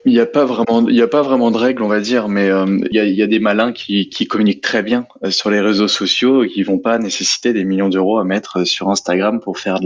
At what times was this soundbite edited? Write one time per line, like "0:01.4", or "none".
0:02.9
0:04.1